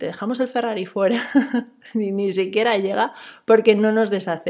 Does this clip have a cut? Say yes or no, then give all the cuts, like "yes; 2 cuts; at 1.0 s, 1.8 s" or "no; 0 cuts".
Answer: no; 0 cuts